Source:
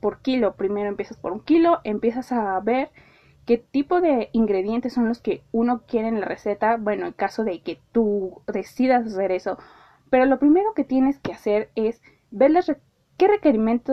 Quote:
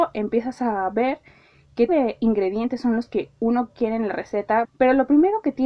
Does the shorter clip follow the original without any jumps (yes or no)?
no